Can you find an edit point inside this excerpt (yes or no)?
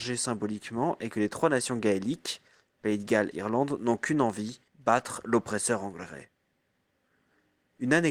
yes